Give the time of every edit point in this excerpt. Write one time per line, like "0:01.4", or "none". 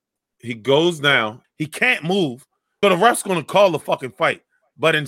0:01.4
0:02.8